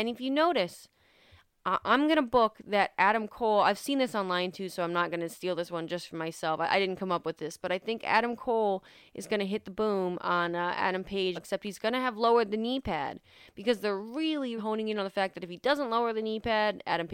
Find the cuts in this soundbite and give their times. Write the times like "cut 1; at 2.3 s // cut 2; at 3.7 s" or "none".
cut 1; at 11.4 s // cut 2; at 14.6 s